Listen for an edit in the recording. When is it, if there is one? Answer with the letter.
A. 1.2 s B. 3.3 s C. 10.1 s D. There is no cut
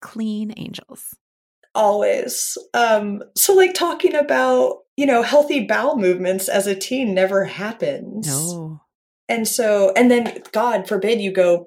D